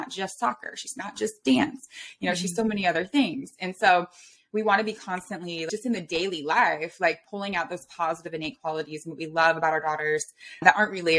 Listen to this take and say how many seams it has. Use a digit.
0